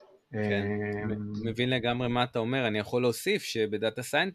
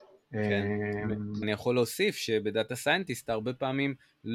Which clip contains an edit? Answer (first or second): second